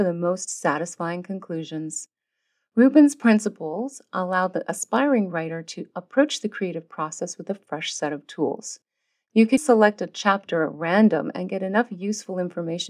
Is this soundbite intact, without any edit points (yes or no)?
no